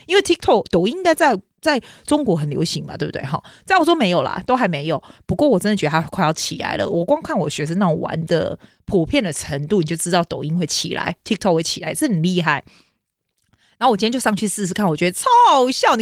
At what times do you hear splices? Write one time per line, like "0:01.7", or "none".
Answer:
none

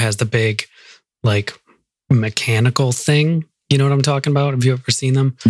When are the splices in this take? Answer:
none

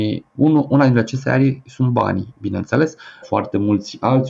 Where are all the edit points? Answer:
0:03.2

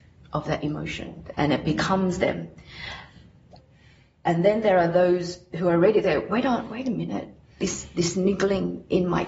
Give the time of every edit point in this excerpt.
0:01.3

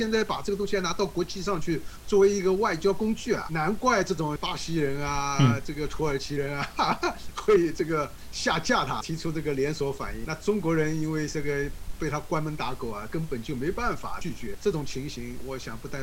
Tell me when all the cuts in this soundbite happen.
none

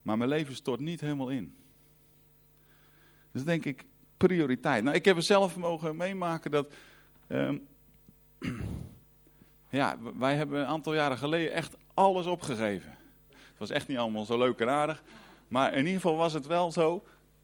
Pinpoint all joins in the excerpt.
0:13.3

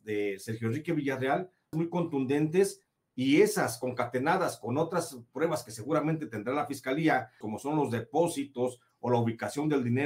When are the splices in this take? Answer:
0:01.7
0:07.4

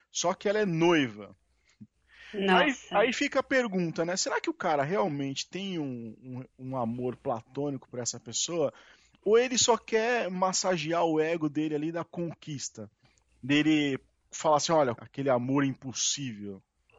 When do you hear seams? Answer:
0:15.0

